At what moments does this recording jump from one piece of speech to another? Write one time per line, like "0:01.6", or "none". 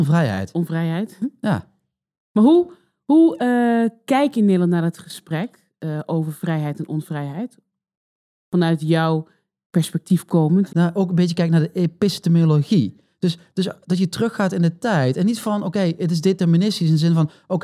0:10.7